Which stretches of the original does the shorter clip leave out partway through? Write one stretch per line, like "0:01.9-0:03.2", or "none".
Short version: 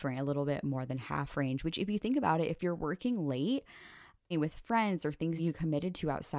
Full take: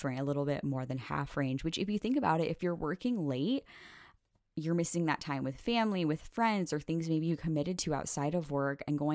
0:04.3-0:06.0
0:07.0-0:07.2